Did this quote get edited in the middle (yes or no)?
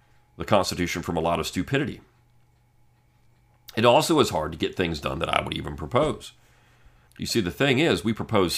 yes